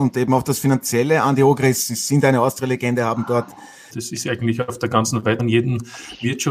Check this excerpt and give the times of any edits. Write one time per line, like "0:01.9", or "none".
0:03.9
0:05.4